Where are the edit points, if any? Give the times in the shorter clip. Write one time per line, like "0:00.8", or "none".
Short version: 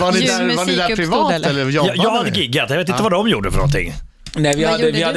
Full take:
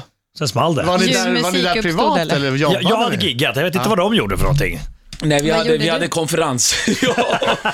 none